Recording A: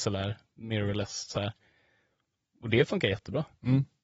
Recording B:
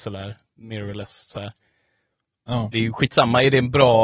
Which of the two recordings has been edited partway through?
B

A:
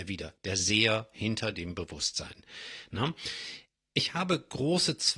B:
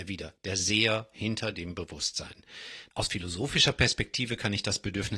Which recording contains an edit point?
B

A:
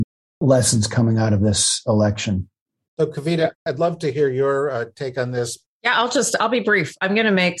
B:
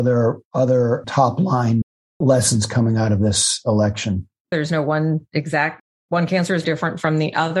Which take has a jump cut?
B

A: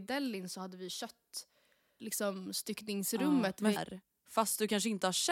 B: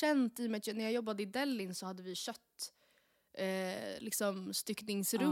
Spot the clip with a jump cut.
A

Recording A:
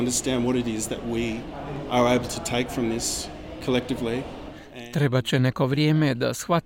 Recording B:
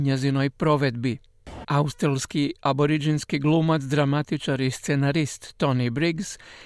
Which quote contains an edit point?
B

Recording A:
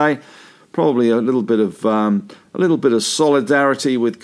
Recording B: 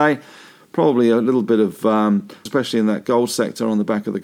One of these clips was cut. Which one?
B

